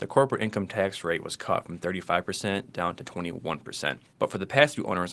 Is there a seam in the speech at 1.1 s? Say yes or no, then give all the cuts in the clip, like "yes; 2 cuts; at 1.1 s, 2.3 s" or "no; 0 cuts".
no; 1 cut; at 4.1 s